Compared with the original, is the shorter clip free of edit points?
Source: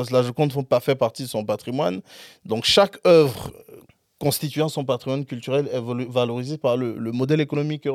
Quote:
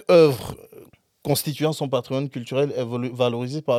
yes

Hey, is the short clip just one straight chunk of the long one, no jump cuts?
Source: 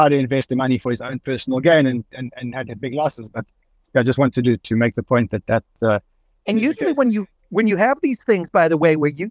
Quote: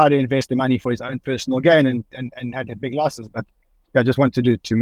yes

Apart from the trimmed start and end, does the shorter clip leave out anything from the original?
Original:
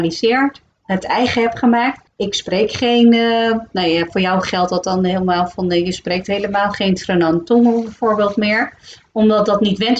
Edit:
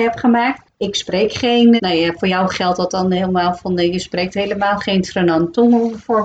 yes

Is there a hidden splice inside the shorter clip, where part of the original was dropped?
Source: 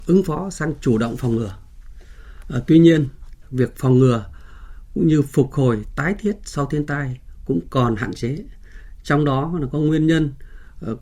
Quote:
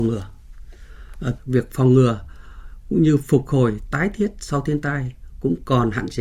yes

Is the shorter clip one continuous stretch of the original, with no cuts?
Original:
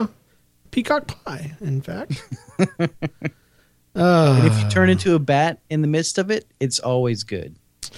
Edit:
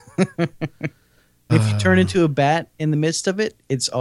no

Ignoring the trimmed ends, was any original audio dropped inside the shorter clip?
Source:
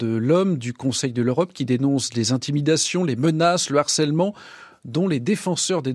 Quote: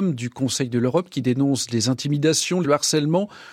yes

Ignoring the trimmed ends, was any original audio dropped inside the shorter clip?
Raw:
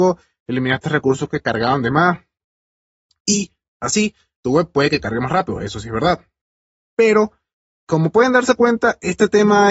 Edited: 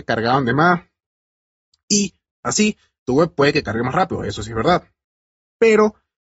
no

